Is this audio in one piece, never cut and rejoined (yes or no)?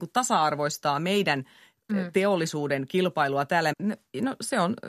no